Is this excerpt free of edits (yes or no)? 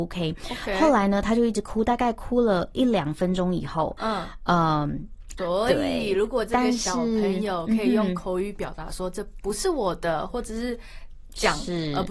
no